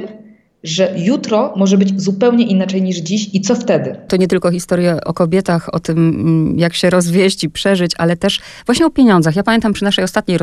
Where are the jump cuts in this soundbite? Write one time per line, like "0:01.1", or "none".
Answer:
0:05.0